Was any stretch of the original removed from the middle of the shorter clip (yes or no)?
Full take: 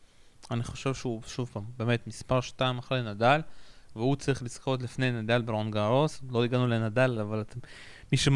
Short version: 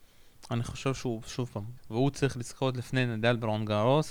yes